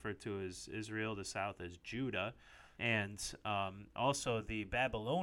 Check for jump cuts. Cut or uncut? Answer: cut